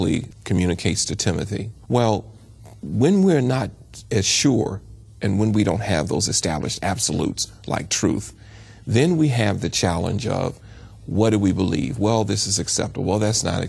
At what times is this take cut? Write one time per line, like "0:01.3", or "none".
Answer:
0:01.8